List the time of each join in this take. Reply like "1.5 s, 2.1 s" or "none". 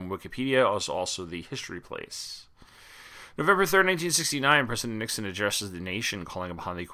none

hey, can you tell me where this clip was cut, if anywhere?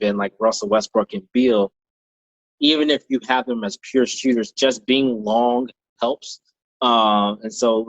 none

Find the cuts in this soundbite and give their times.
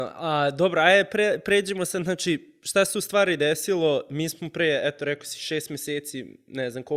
none

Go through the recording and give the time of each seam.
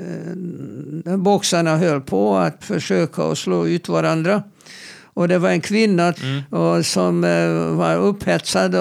2.6 s, 6.1 s

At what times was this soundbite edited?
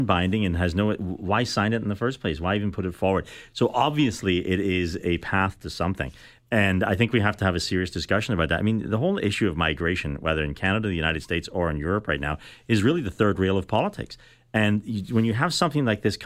none

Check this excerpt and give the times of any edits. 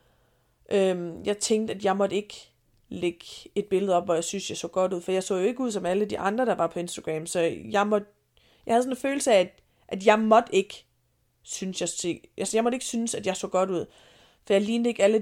none

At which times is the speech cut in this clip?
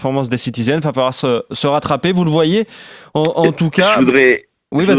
none

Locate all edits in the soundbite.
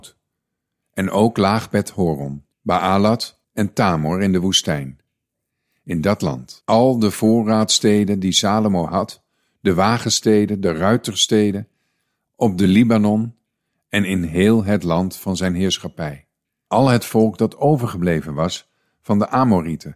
12.3 s

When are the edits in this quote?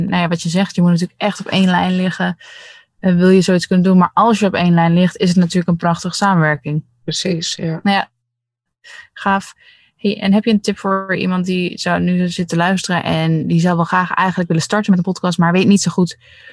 none

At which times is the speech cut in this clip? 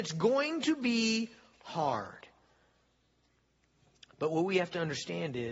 none

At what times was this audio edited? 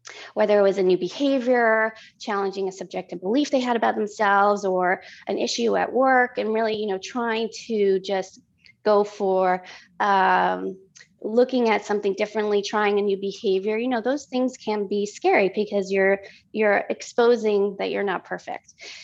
none

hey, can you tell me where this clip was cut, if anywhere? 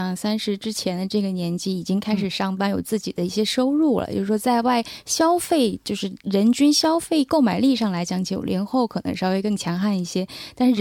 none

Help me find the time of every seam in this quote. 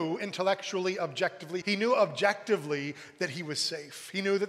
1.6 s

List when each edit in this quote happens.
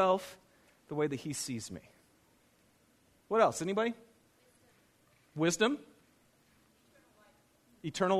none

